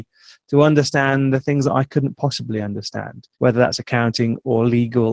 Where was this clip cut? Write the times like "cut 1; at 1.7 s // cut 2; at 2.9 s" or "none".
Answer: cut 1; at 3.3 s